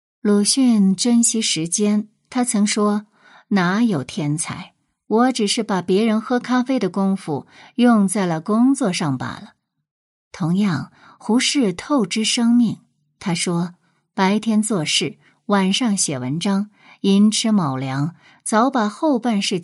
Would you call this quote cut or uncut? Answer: uncut